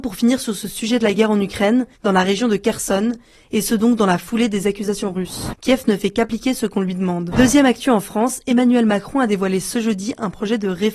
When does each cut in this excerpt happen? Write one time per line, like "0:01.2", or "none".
0:01.9
0:05.5
0:07.3